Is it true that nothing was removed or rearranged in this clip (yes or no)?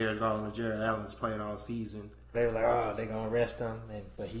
no